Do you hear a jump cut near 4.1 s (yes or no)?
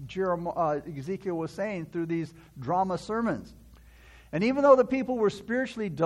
no